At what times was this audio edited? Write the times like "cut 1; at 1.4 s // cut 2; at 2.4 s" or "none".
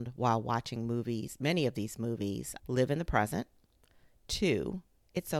cut 1; at 2.6 s